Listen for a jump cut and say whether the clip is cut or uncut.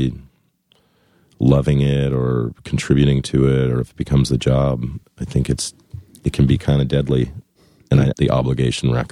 cut